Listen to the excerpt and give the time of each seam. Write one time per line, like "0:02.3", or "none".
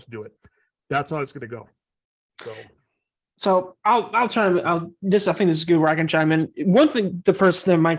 none